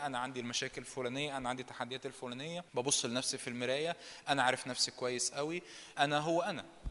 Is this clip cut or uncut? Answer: cut